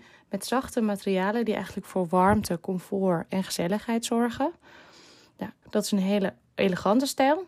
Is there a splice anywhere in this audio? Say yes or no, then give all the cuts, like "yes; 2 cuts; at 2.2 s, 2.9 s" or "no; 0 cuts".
yes; 1 cut; at 5.6 s